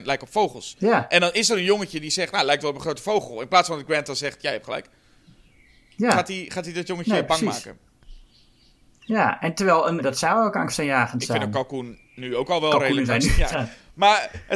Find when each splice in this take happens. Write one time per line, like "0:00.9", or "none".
0:10.0
0:13.5